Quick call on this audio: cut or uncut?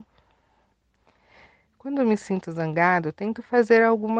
uncut